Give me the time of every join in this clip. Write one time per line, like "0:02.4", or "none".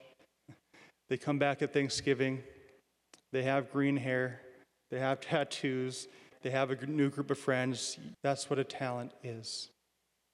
0:06.3
0:08.1